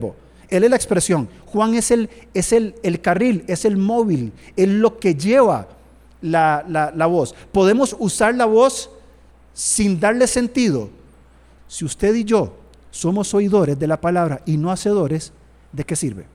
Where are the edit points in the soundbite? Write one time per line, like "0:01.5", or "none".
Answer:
0:11.6